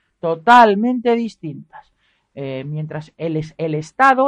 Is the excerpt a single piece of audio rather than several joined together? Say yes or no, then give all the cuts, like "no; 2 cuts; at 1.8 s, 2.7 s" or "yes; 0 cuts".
yes; 0 cuts